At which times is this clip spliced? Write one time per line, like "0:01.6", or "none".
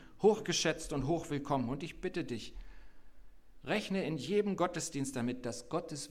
none